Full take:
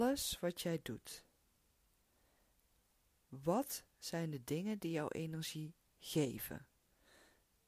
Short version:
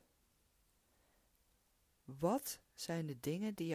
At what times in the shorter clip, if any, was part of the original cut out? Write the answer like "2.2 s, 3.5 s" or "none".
none